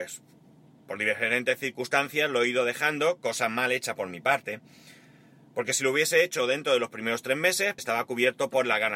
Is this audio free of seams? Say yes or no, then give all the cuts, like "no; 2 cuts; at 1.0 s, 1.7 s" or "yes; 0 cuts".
no; 1 cut; at 7.8 s